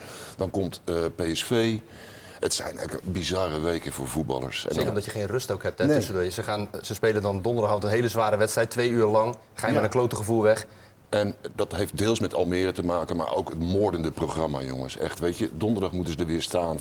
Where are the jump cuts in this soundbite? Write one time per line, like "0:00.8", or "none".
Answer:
0:11.0